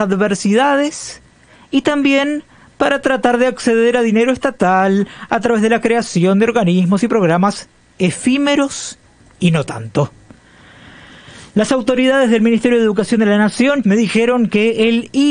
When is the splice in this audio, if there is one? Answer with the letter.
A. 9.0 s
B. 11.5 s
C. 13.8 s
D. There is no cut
C